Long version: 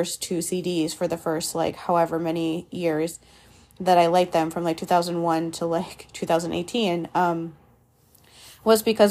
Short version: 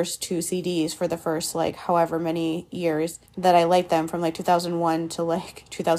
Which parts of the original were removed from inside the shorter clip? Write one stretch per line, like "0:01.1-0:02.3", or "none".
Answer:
0:03.3-0:03.7